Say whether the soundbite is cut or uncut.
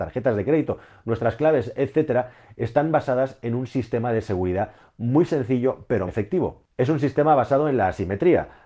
cut